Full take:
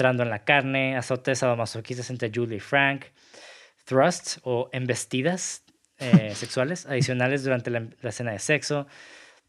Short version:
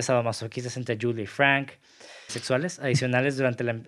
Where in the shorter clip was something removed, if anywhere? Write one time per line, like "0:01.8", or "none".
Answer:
0:02.3